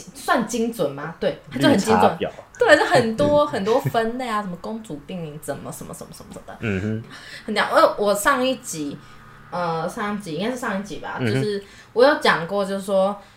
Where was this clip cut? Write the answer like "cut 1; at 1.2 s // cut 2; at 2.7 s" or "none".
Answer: cut 1; at 7.0 s